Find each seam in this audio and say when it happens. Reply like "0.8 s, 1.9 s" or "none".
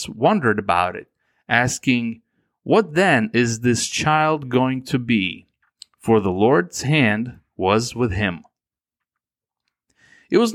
none